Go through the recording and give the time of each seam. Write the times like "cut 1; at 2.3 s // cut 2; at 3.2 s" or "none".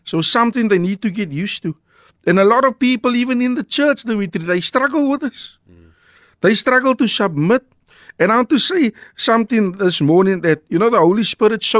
none

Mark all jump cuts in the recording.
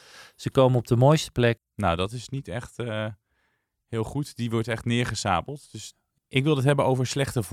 cut 1; at 1.6 s // cut 2; at 6.2 s

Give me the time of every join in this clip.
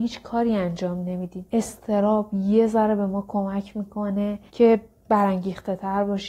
cut 1; at 1.5 s // cut 2; at 4.5 s

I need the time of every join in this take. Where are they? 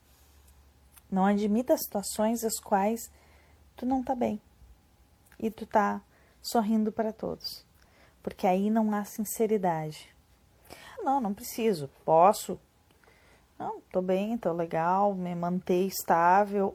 cut 1; at 11.0 s

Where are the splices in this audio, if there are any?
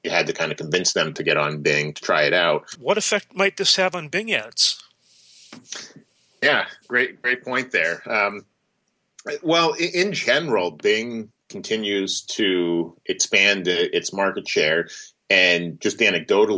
cut 1; at 2.7 s

